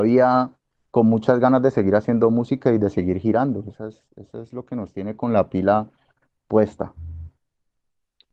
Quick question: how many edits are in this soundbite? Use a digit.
0